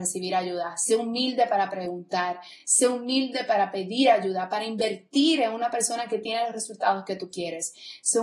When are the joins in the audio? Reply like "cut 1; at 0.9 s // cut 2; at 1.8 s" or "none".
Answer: none